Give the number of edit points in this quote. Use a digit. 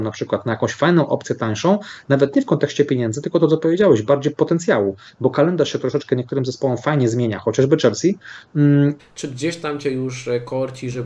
1